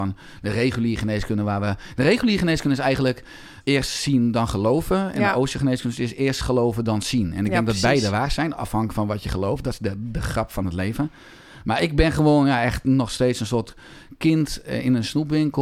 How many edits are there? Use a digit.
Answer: 1